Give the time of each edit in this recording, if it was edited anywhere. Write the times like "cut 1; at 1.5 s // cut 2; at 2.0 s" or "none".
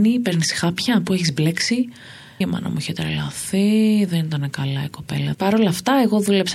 cut 1; at 2.4 s // cut 2; at 5.3 s